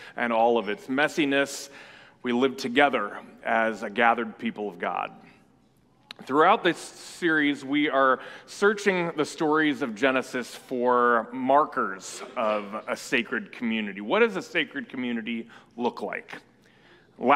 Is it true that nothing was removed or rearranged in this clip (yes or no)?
yes